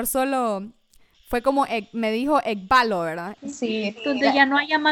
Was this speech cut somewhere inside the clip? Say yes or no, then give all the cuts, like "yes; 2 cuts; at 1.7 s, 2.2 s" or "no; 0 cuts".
yes; 1 cut; at 3.4 s